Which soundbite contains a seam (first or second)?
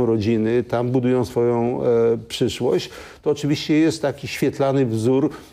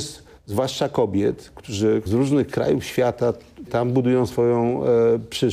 second